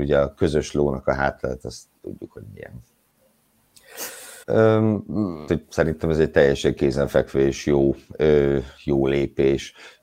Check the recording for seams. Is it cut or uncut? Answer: cut